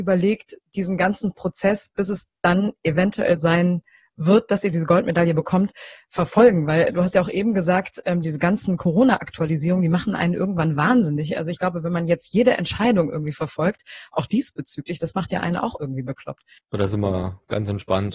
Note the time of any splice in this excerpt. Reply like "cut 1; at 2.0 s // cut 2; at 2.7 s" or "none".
cut 1; at 3.4 s